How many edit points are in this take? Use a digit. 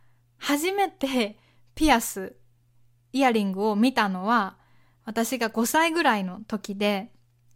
0